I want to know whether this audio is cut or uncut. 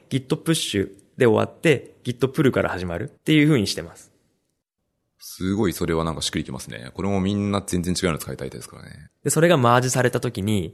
cut